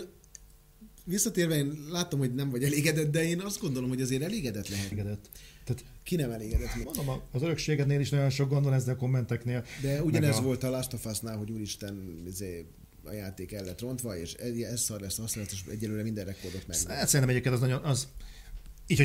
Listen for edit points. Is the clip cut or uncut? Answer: cut